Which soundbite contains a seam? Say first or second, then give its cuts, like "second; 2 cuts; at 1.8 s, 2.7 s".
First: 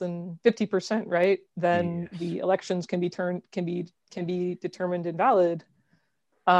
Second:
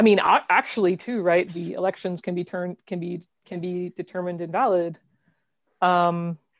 second; 1 cut; at 1.5 s